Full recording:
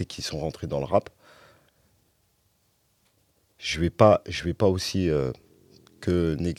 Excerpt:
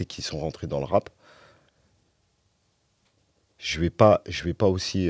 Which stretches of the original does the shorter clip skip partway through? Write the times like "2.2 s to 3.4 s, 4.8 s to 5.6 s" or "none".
none